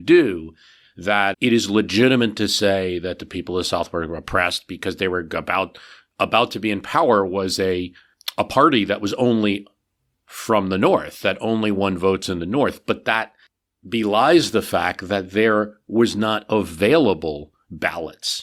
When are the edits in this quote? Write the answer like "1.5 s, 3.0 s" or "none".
1.3 s

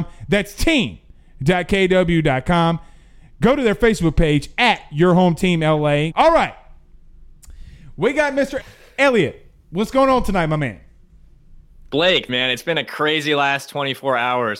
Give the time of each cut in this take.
6.1 s, 8.6 s, 12.3 s

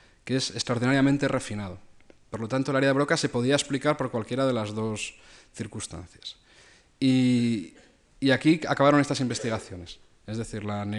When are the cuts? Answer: none

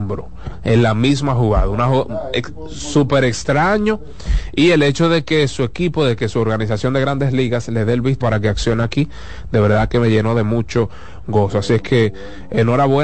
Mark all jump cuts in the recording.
8.2 s

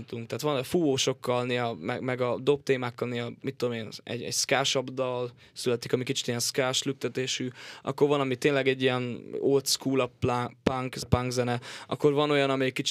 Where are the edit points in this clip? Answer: 11.0 s

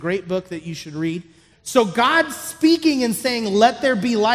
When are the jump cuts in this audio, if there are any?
1.5 s

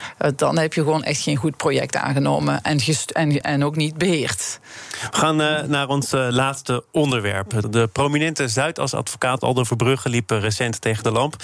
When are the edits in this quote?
3.4 s, 7.6 s

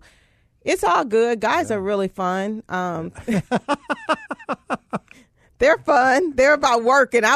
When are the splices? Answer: none

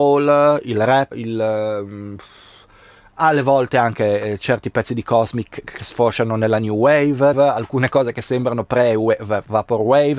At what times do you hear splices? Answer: 1.1 s, 7.3 s

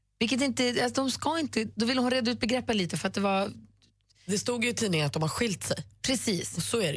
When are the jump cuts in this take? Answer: 1.7 s

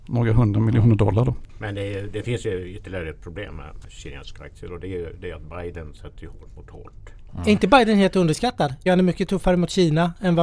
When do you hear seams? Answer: 3.8 s, 7.3 s, 8.9 s

